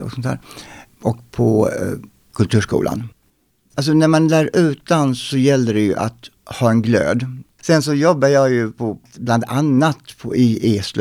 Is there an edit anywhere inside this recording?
yes; 2 cuts; at 6.4 s, 7.4 s

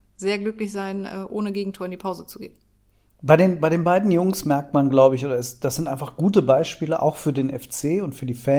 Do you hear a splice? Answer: no; 0 cuts

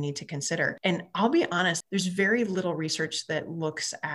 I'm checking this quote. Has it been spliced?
yes; 1 cut; at 1.8 s

